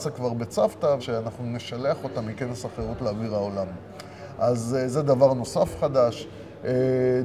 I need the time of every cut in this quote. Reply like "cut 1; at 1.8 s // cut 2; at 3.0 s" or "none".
cut 1; at 1.0 s